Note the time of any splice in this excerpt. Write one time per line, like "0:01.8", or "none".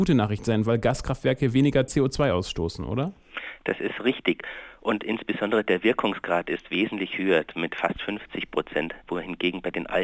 none